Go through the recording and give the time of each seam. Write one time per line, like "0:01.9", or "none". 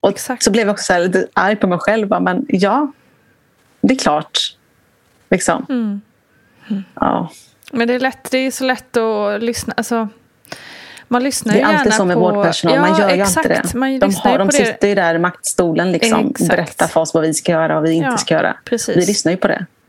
none